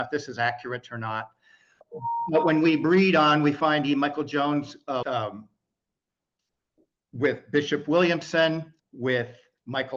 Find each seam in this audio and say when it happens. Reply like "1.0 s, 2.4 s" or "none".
5.0 s, 8.8 s